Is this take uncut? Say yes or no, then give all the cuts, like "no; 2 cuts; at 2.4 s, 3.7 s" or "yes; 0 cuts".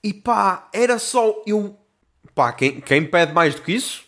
yes; 0 cuts